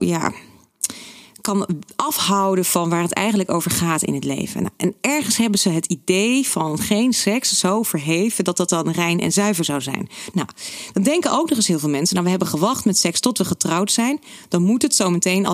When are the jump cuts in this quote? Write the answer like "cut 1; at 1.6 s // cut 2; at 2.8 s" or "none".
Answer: cut 1; at 10.3 s

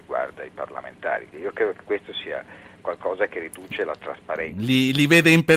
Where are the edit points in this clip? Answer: cut 1; at 1.3 s

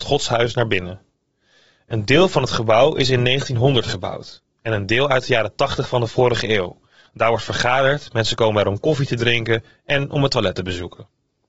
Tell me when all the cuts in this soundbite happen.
none

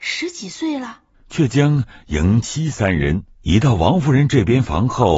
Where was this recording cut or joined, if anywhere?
cut 1; at 1.1 s // cut 2; at 2.4 s

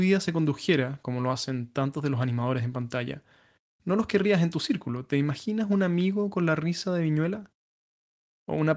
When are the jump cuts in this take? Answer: none

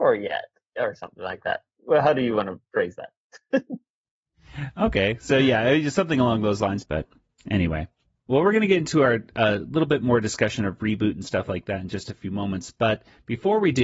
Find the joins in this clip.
cut 1; at 6.8 s

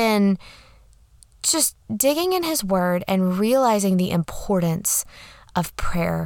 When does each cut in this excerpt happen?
none

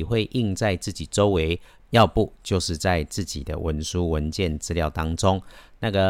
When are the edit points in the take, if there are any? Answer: none

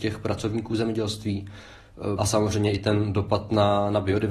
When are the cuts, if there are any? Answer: cut 1; at 2.2 s

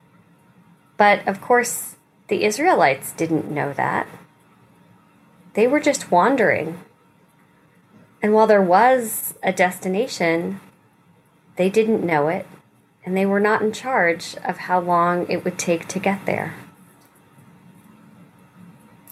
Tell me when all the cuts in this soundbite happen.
none

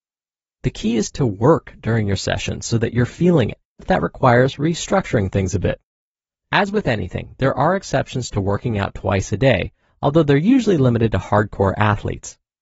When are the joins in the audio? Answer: cut 1; at 3.8 s // cut 2; at 6.3 s

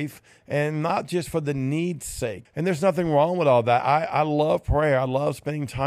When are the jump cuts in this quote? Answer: cut 1; at 2.4 s

